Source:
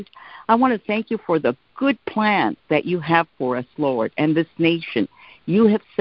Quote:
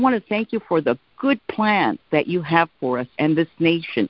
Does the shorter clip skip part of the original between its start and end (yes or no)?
yes